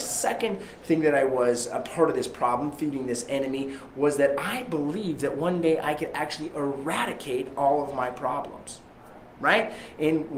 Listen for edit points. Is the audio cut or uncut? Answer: uncut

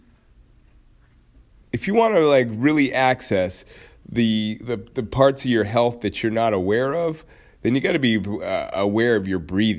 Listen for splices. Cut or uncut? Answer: uncut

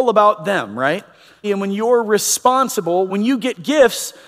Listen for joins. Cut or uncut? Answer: cut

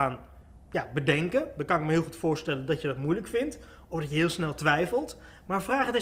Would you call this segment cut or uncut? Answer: uncut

